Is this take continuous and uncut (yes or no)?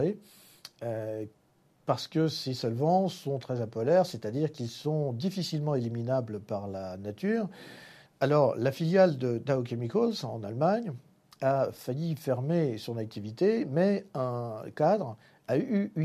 no